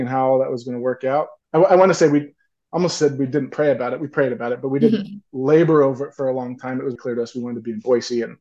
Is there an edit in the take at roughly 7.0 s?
yes; 2 cuts; at 1.4 s, 7.0 s

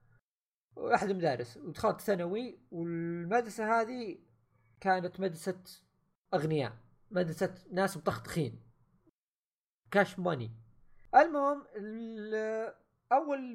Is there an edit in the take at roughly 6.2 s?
no; 1 cut; at 11.1 s

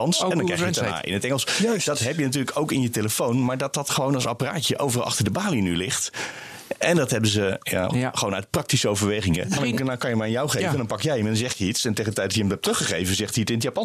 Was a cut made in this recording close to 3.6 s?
no; 2 cuts; at 7.9 s, 9.6 s

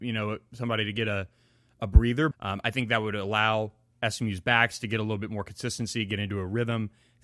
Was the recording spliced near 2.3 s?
yes; 1 cut; at 2.3 s

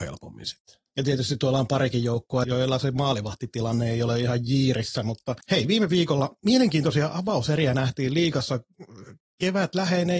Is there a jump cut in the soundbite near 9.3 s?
no; 2 cuts; at 2.4 s, 5.4 s

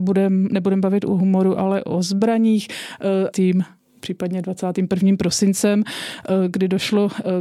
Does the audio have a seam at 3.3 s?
yes; 1 cut; at 3.3 s

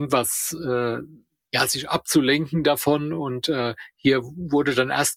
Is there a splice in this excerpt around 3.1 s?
no; 0 cuts

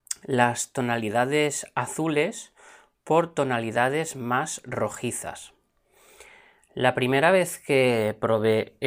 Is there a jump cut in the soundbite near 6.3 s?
no; 0 cuts

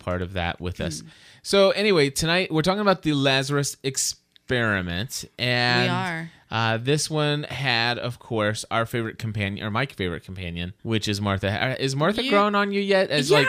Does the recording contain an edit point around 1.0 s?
no; 1 cut; at 10.8 s

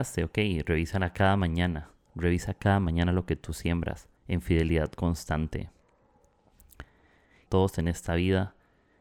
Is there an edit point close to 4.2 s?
yes; 2 cuts; at 4.2 s, 7.5 s

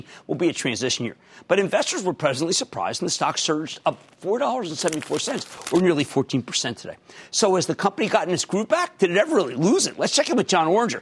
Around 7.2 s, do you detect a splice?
no; 0 cuts

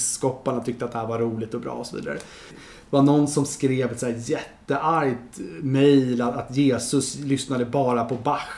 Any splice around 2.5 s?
yes; 1 cut; at 2.5 s

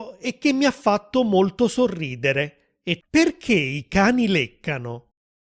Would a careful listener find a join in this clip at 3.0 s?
yes; 1 cut; at 3.0 s

